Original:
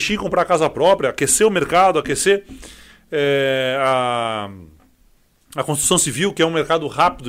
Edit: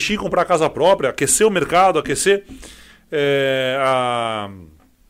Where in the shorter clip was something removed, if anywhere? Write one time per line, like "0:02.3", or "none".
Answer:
none